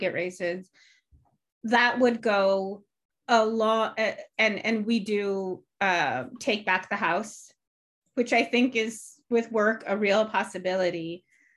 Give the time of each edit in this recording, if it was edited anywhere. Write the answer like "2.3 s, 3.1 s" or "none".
none